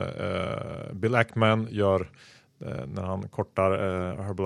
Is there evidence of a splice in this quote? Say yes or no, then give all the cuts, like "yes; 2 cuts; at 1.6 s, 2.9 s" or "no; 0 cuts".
no; 0 cuts